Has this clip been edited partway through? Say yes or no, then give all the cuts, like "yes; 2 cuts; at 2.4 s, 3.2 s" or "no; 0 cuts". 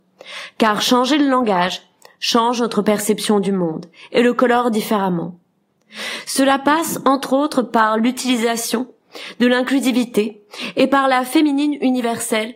no; 0 cuts